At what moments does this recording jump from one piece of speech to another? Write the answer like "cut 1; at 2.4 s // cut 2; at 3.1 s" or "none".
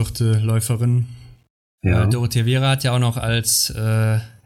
cut 1; at 1.8 s